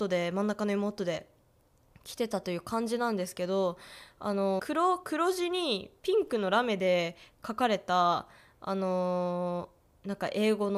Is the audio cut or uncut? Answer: cut